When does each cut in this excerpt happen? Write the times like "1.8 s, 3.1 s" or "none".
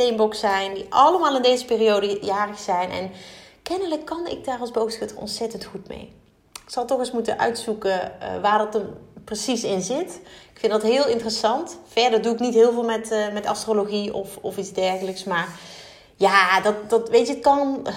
none